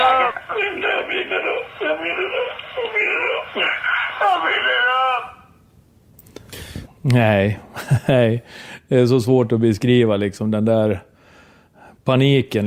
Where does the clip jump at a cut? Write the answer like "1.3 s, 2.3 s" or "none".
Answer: 6.9 s